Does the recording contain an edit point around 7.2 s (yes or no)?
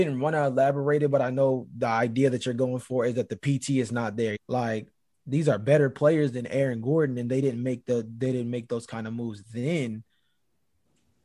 no